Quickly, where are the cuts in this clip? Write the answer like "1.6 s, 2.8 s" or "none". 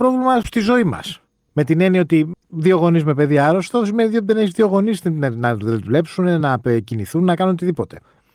none